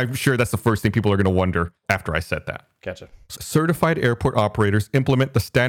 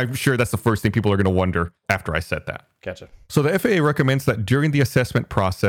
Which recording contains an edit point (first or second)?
first